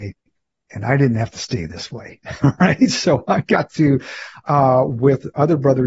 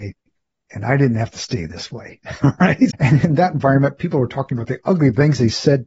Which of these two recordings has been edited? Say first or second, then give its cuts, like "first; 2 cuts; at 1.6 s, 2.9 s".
second; 1 cut; at 2.9 s